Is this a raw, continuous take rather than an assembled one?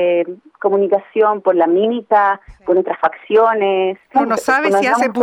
no; 1 cut; at 4.1 s

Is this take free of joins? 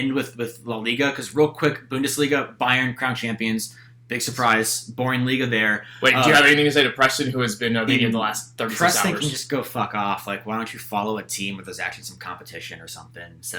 no; 1 cut; at 7.9 s

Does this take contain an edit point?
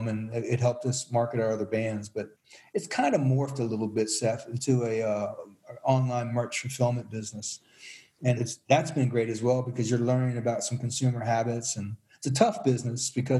yes; 1 cut; at 8.4 s

